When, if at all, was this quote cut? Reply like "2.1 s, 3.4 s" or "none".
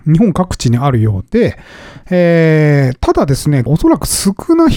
3.7 s